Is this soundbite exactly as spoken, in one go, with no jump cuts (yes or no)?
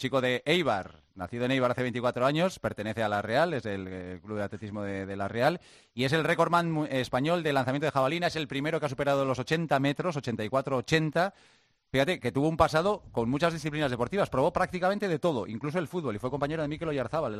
yes